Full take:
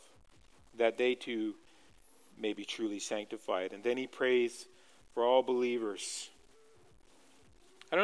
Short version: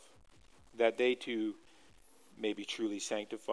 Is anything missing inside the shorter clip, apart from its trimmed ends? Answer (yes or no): no